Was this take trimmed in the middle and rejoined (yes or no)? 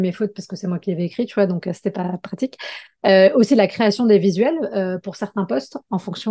no